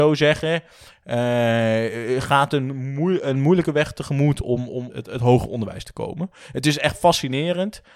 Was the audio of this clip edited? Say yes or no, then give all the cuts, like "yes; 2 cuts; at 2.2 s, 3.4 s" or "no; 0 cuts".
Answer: yes; 1 cut; at 4.9 s